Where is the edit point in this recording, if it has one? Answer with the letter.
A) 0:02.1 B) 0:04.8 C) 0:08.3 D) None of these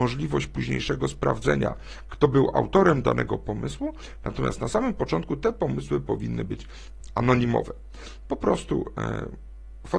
C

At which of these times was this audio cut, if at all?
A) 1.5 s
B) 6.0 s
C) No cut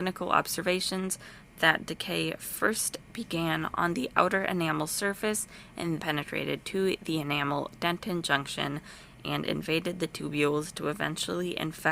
B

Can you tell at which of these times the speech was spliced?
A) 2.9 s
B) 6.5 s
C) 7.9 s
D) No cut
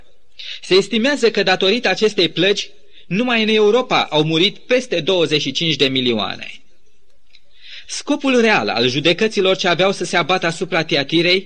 D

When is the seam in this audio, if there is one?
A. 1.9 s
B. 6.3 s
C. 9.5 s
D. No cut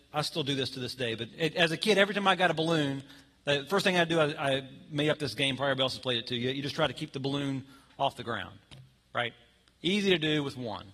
D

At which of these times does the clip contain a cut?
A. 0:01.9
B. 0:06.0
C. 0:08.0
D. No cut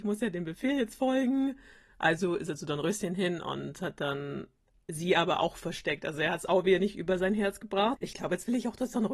C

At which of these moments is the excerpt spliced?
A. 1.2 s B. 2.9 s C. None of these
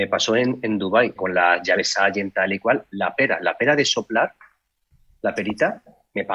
A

